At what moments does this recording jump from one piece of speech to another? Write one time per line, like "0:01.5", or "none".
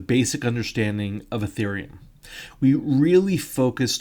none